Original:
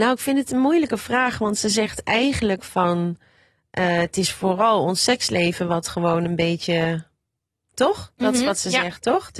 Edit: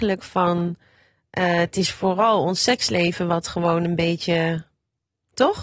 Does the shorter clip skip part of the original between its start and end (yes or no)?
no